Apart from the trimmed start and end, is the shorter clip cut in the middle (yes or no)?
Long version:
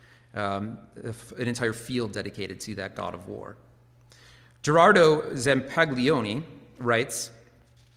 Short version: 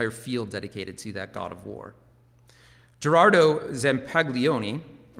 no